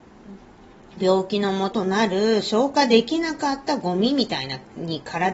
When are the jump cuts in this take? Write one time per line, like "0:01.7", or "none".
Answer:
0:01.7